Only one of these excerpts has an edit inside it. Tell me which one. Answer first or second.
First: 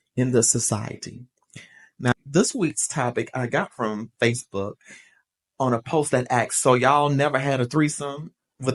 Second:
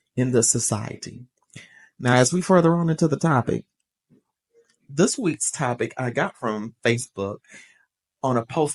first